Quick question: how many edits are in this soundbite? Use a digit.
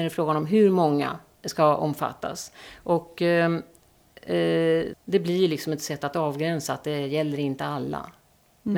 1